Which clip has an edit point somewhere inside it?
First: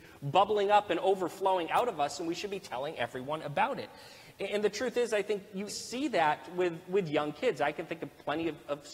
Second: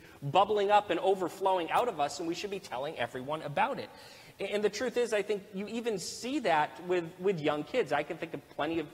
first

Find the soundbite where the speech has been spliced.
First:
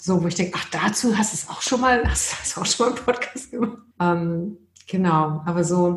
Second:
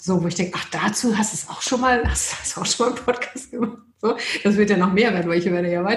first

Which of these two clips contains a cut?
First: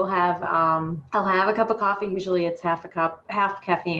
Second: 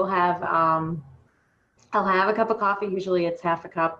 first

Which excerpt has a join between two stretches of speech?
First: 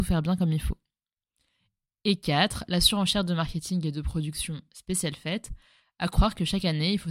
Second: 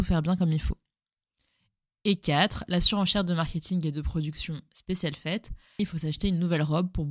second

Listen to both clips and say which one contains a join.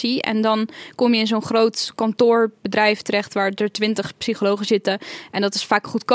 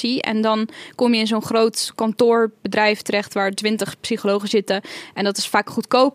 second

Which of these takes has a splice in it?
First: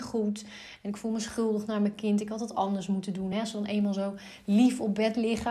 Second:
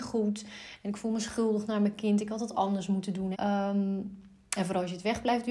second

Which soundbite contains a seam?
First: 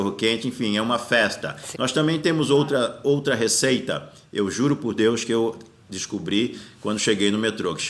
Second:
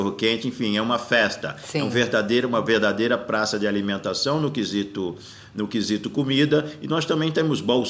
first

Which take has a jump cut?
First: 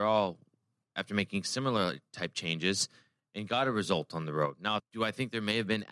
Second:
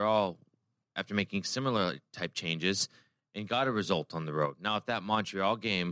first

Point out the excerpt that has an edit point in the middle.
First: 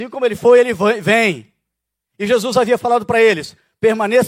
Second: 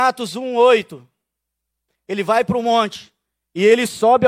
second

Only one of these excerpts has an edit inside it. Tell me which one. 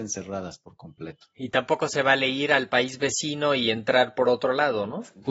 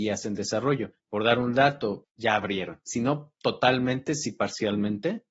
second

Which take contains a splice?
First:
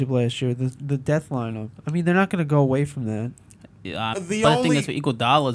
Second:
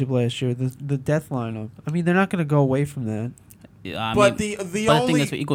first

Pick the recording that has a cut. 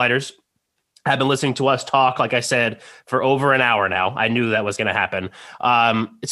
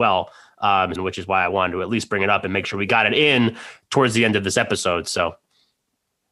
second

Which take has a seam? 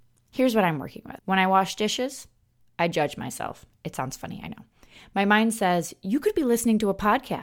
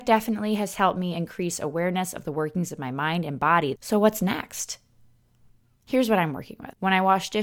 second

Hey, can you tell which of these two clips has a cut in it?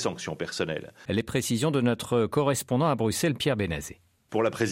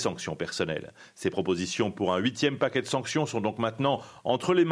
first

